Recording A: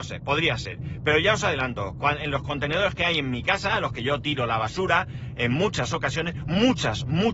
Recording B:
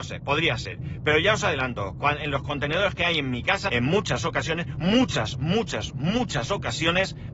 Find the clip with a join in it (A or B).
B